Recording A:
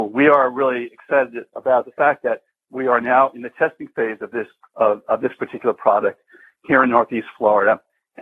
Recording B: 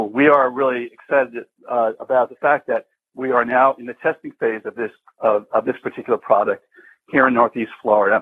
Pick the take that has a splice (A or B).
A